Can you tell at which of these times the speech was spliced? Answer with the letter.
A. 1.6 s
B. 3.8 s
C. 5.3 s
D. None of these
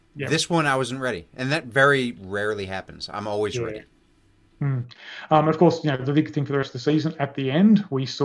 D